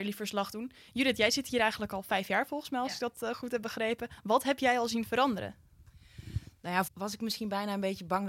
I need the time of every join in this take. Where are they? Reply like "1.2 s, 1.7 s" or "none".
6.9 s